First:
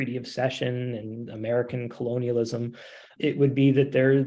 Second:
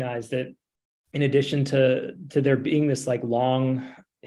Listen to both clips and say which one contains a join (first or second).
first